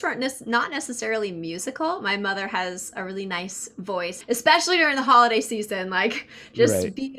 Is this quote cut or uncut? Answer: cut